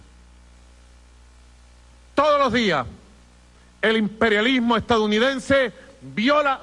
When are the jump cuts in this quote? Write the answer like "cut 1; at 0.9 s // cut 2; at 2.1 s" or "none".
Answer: none